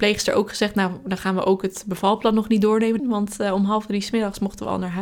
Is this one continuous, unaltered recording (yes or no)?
no